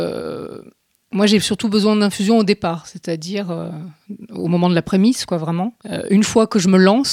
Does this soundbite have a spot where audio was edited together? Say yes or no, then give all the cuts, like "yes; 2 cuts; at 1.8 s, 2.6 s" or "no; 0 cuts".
no; 0 cuts